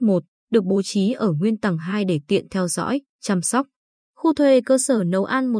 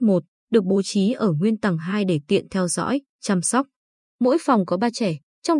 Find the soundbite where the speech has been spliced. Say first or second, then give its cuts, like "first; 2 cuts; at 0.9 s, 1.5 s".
second; 1 cut; at 4.0 s